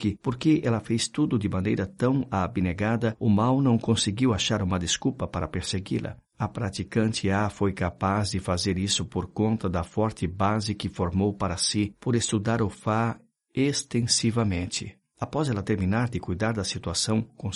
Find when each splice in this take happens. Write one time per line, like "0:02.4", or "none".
0:15.0